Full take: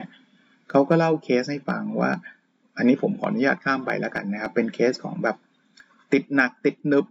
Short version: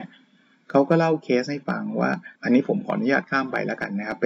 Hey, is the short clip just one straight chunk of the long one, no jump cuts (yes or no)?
no